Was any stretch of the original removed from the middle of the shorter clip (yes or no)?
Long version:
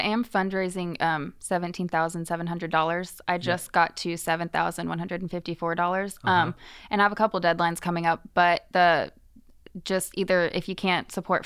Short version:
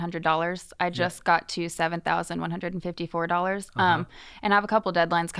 no